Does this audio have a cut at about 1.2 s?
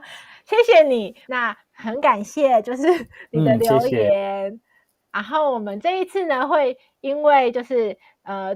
yes; 1 cut; at 1.2 s

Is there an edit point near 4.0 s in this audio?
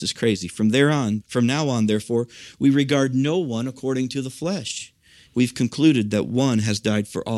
no; 2 cuts; at 1.2 s, 5.3 s

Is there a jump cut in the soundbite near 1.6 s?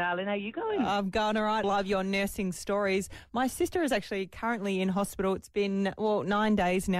yes; 1 cut; at 1.6 s

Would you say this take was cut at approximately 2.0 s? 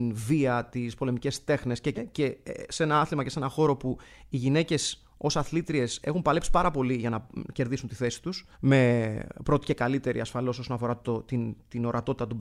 yes; 2 cuts; at 2.0 s, 8.5 s

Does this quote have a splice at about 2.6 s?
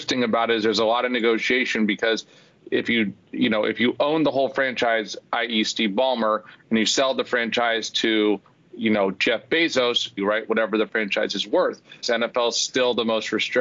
no; 2 cuts; at 10.2 s, 12.0 s

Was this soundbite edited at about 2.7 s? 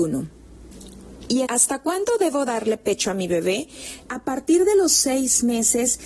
no; 2 cuts; at 1.4 s, 4.1 s

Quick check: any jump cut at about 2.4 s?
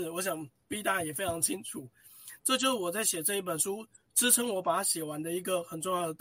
yes; 1 cut; at 2.4 s

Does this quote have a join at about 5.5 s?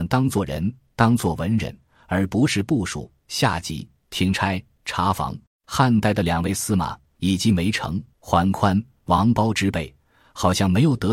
yes; 2 cuts; at 5.5 s, 8.1 s

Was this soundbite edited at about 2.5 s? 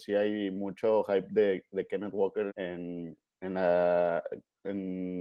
yes; 1 cut; at 2.5 s

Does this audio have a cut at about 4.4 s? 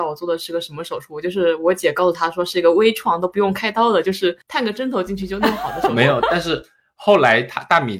yes; 1 cut; at 4.4 s

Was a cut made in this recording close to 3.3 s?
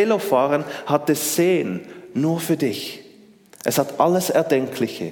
no; 0 cuts

